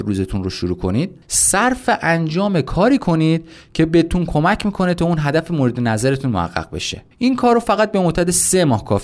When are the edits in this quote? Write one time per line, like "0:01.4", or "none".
0:01.2
0:07.1